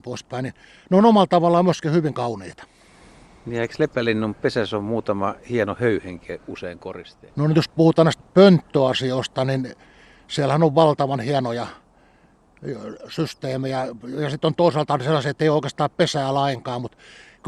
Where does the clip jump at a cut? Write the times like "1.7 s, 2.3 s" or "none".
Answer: 7.3 s